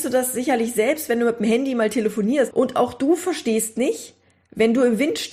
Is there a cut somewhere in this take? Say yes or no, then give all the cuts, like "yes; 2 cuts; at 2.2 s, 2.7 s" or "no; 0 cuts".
yes; 1 cut; at 2.5 s